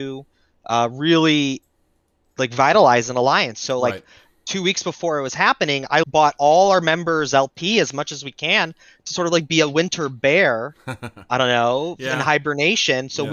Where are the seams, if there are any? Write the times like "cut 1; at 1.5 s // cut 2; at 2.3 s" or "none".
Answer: cut 1; at 6.0 s